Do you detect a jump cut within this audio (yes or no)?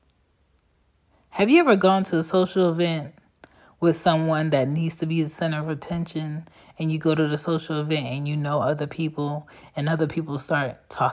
no